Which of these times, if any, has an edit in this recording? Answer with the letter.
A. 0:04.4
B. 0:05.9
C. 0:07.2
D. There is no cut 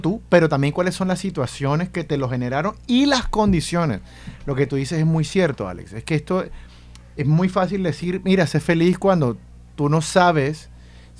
D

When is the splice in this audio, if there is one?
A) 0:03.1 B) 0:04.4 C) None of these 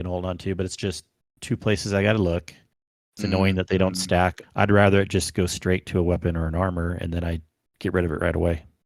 B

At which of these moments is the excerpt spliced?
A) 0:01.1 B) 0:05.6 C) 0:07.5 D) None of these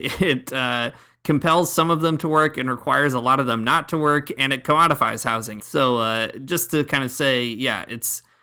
B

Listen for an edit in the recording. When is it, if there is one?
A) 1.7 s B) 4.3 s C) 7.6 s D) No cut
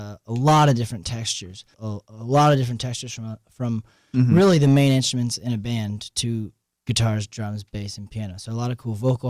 A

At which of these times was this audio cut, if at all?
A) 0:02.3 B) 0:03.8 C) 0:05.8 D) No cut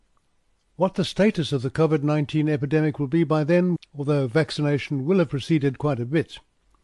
B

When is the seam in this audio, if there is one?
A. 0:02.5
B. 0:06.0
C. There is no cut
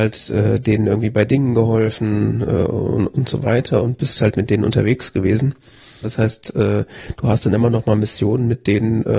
B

